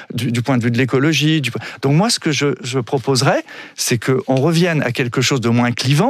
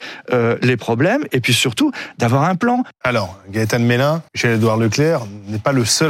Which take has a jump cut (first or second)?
second